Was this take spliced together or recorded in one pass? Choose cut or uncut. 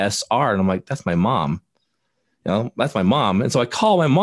uncut